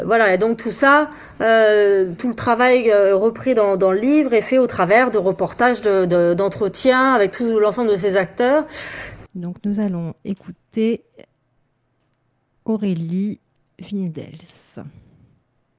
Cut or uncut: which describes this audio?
cut